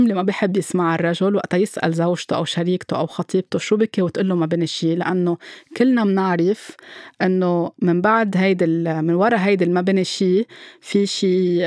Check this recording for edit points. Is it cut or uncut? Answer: uncut